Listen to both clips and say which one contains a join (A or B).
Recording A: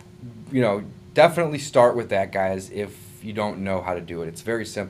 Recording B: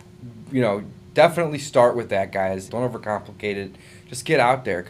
B